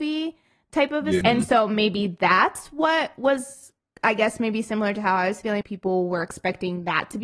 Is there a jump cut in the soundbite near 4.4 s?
no; 2 cuts; at 1.2 s, 5.6 s

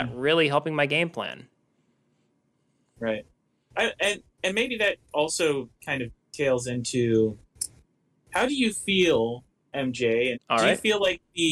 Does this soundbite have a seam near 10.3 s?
yes; 2 cuts; at 6.2 s, 10.3 s

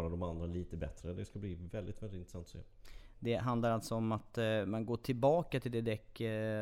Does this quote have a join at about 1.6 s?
no; 0 cuts

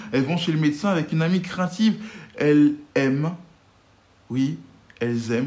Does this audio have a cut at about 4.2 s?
no; 1 cut; at 2.9 s

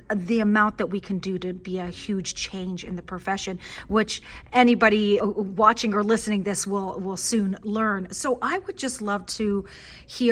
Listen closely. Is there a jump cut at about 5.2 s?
yes; 1 cut; at 5.2 s

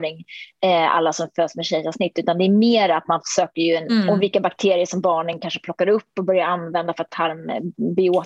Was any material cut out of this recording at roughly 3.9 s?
yes; 1 cut; at 3.9 s

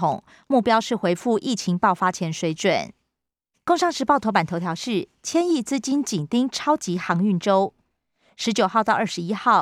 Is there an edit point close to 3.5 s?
yes; 1 cut; at 3.5 s

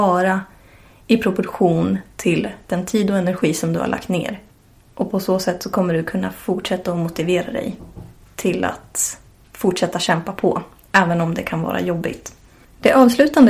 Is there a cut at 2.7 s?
yes; 1 cut; at 2.7 s

